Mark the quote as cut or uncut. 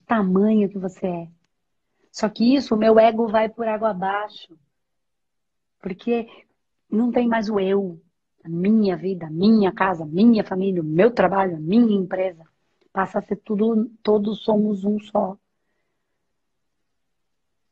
uncut